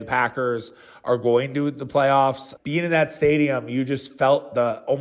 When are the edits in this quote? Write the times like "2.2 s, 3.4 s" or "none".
2.6 s